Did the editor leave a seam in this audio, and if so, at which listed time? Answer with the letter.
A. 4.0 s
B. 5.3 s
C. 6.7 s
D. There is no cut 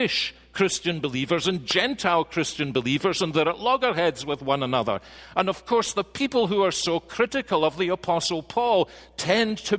D